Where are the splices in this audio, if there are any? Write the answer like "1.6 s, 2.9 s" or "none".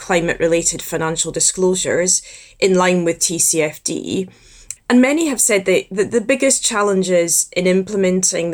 4.8 s